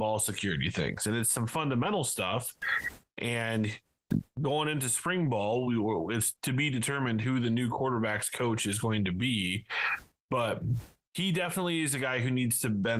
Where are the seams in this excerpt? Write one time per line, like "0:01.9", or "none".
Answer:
none